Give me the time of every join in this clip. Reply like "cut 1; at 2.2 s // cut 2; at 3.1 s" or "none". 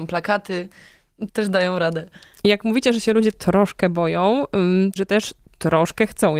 cut 1; at 1.3 s // cut 2; at 5.0 s

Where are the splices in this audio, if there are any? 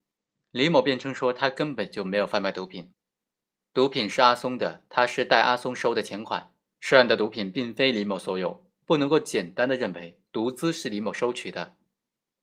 cut 1; at 6.8 s

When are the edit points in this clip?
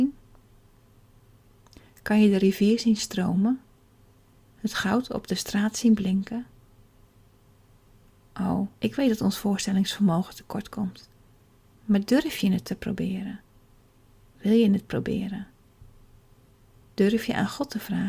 cut 1; at 8.7 s

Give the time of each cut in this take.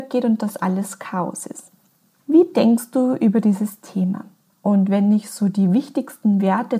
cut 1; at 2.2 s // cut 2; at 4.5 s

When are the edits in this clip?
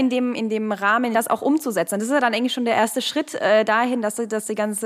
cut 1; at 1.1 s

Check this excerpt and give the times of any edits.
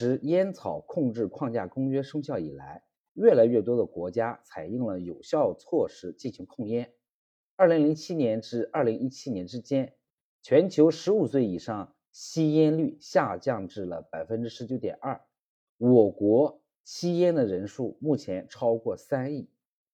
none

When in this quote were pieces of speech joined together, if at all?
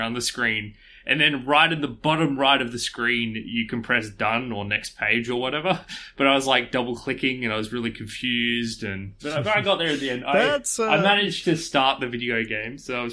none

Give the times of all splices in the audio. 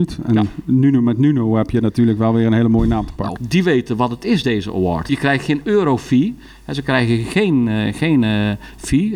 cut 1; at 3.4 s // cut 2; at 5.1 s

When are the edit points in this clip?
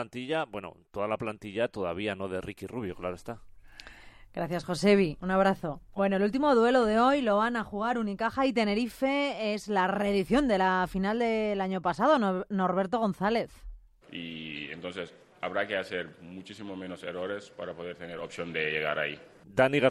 cut 1; at 6.0 s // cut 2; at 14.0 s

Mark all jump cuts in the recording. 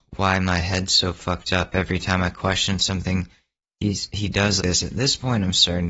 cut 1; at 4.6 s

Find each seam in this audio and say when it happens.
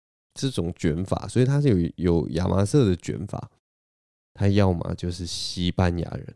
cut 1; at 4.1 s

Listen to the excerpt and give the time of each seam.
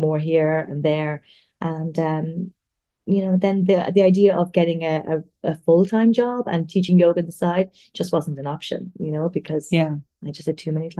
none

